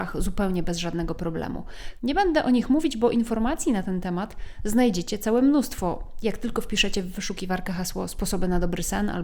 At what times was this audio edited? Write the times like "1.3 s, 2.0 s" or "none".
2.0 s